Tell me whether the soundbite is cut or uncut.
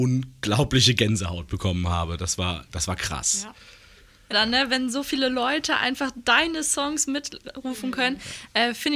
cut